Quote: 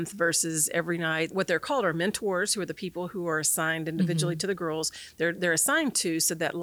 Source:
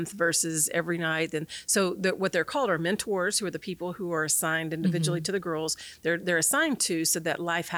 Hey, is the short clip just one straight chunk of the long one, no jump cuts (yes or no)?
no